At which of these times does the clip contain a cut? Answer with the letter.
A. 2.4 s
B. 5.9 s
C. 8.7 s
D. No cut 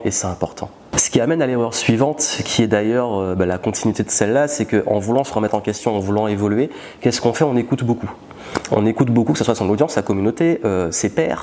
D